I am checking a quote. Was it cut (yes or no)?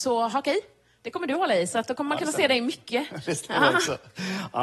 no